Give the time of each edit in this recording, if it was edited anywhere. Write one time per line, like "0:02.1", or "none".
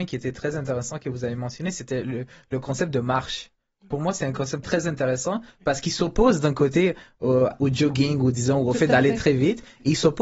0:04.6
0:07.5